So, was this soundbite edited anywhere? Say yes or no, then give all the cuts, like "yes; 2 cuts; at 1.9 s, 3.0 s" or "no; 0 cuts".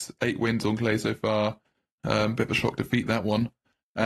yes; 1 cut; at 2.0 s